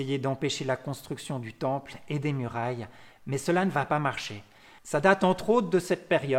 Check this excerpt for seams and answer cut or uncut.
cut